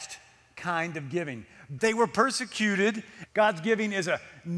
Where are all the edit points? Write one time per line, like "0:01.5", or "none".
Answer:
0:01.8
0:03.2